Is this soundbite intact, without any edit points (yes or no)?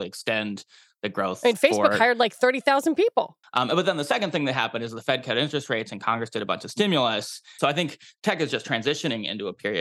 no